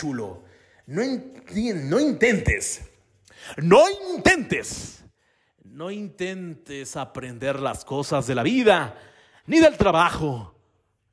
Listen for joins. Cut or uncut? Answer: uncut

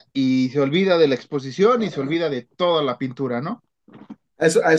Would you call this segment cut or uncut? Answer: uncut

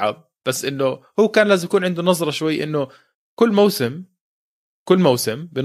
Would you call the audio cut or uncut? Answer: uncut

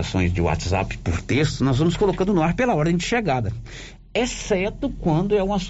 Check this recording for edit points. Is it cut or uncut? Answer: uncut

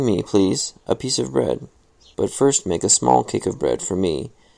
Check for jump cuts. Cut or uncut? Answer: cut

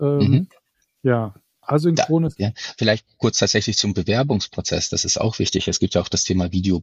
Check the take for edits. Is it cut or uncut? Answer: cut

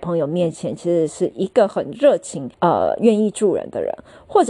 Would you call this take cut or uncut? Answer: cut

